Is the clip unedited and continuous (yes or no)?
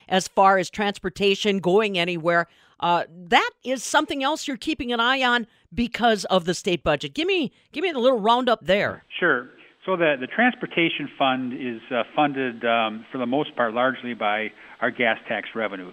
yes